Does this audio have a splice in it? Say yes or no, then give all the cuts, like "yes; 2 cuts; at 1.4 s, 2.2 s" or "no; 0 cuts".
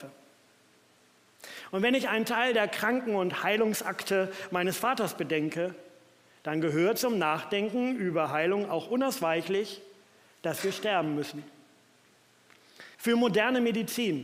yes; 1 cut; at 12.9 s